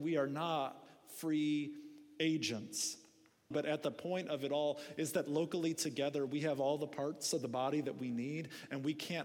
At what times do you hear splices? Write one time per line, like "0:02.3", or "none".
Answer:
0:03.5

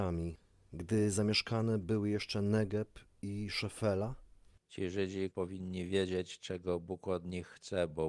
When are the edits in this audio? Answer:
0:05.3

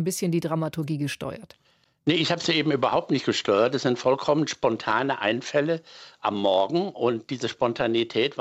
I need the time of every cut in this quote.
none

